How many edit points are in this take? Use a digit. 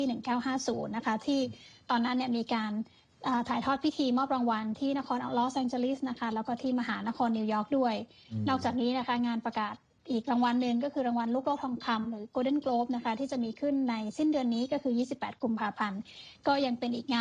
0